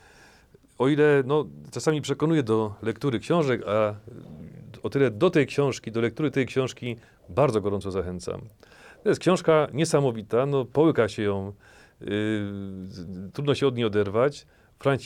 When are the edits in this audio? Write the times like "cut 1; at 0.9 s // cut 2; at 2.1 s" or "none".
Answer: none